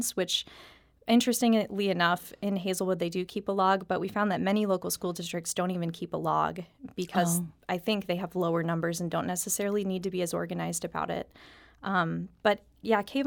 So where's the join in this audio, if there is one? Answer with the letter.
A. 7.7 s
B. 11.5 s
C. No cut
C